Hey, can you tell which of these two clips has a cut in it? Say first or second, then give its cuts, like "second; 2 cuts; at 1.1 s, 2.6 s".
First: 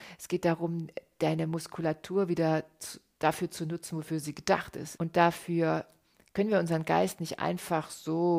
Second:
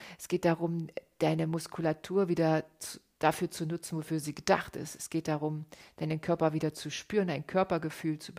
first; 1 cut; at 5.0 s